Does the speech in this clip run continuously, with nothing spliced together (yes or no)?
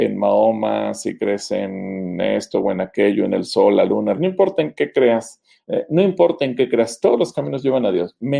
no